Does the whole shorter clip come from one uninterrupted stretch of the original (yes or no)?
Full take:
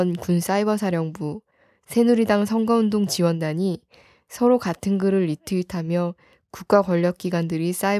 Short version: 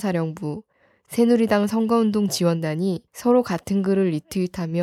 no